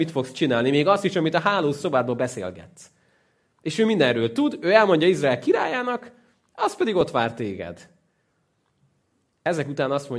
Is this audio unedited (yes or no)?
yes